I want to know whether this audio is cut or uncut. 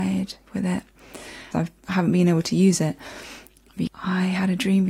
cut